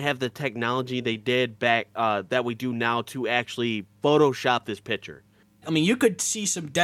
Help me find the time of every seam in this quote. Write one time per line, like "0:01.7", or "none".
0:05.6